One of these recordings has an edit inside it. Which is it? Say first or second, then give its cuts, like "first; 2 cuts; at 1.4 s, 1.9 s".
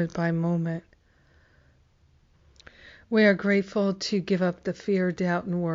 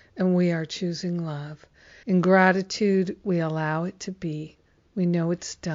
second; 1 cut; at 2.0 s